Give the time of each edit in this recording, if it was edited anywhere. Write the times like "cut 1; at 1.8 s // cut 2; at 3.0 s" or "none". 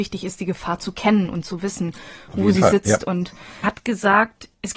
cut 1; at 3.6 s